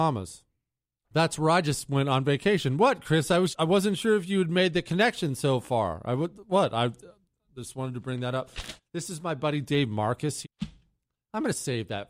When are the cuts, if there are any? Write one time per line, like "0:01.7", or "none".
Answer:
0:03.5
0:08.8
0:10.4